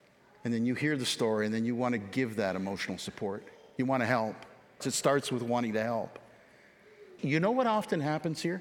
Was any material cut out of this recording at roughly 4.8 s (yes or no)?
yes